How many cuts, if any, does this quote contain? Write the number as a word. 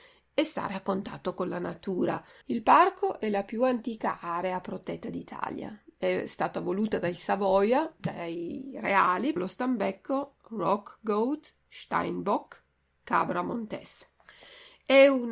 two